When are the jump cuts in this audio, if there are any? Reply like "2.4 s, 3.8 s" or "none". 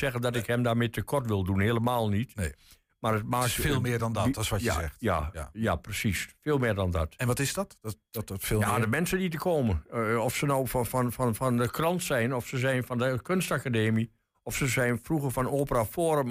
none